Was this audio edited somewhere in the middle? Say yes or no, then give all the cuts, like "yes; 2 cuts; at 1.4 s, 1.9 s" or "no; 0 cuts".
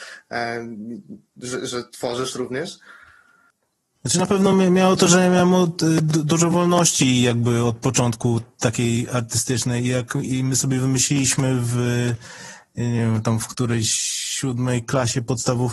no; 0 cuts